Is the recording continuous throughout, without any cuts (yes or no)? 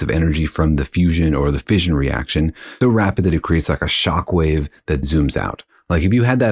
no